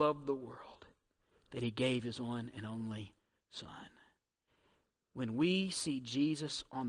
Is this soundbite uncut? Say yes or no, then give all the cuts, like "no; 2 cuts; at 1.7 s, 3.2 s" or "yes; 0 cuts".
yes; 0 cuts